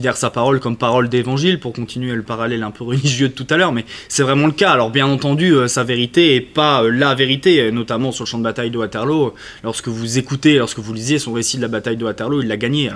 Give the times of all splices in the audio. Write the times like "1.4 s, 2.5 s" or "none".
none